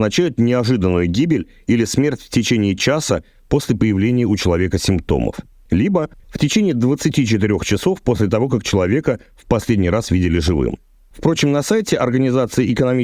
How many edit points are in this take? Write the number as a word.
one